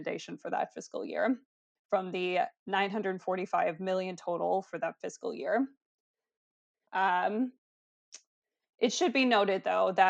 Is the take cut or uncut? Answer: cut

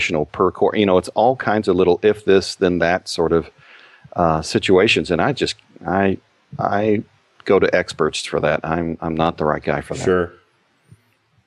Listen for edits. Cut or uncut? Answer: uncut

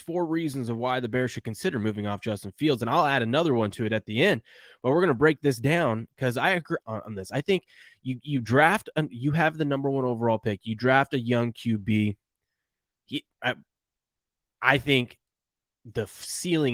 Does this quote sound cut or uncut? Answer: cut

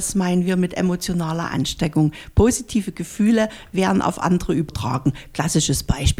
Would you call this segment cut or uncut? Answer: uncut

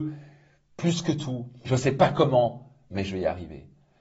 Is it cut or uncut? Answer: cut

